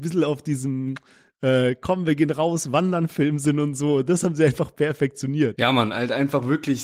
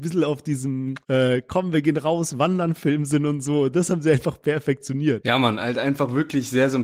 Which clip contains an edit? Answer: second; 1 cut; at 1.0 s

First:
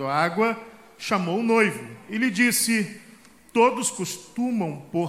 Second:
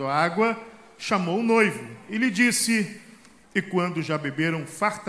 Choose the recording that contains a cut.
second; 1 cut; at 3.4 s

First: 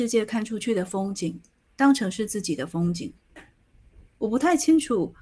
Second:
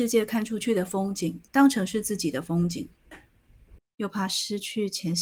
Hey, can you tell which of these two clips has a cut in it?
second; 2 cuts; at 1.5 s, 3.8 s

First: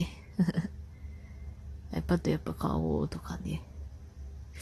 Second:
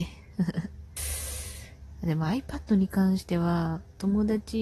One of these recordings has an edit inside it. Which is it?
second; 1 cut; at 1.0 s

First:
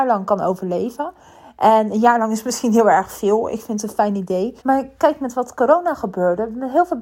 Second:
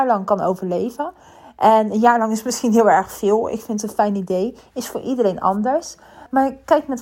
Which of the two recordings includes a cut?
first; 1 cut; at 4.6 s

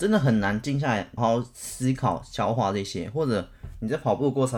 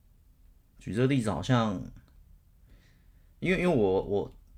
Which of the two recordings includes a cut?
first; 1 cut; at 1.2 s

